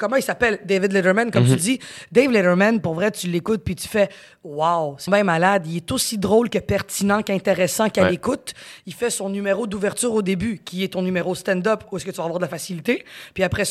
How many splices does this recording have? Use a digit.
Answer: 1